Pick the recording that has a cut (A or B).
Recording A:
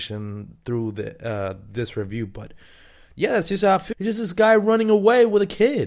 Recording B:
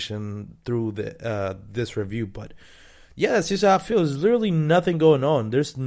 A